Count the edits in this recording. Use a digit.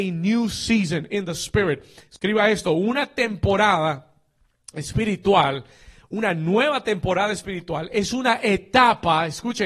0